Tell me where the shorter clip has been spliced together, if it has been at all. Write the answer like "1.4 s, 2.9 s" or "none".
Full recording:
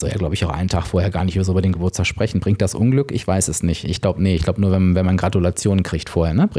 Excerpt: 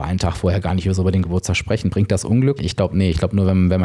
2.6 s